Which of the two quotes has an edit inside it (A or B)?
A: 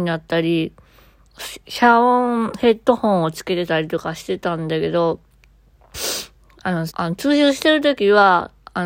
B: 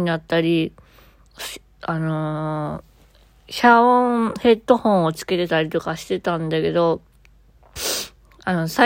A